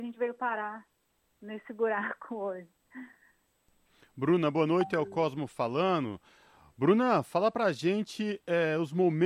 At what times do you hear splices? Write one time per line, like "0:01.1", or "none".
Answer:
none